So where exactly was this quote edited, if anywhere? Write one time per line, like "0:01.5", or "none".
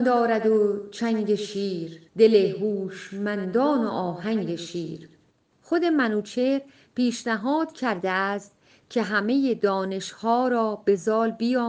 0:02.1